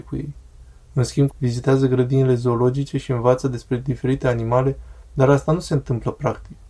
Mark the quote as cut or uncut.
cut